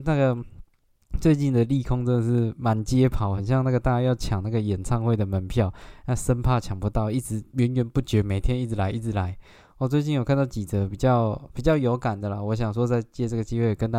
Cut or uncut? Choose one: uncut